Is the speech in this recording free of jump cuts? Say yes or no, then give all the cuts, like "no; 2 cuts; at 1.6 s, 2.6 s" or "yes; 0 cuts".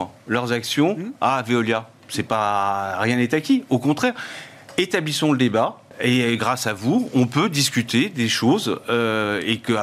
no; 1 cut; at 5.9 s